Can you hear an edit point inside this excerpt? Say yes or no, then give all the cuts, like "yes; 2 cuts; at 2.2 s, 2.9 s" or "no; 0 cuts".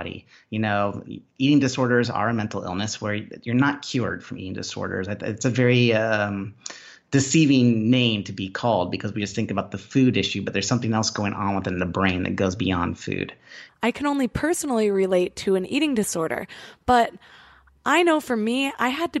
yes; 1 cut; at 13.7 s